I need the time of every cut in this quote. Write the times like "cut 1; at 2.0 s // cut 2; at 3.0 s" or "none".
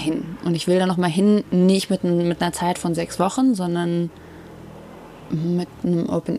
none